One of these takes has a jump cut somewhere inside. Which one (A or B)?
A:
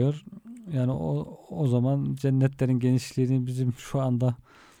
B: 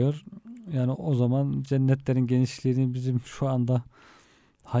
B